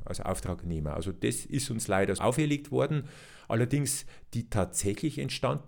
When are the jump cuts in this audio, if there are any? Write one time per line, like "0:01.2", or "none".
0:02.2